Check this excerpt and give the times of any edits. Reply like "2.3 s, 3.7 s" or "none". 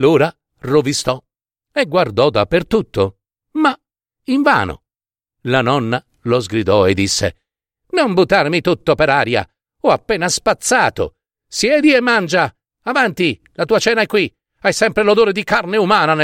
none